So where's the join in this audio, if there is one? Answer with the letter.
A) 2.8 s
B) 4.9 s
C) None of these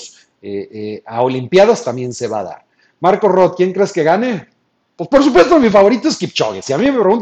C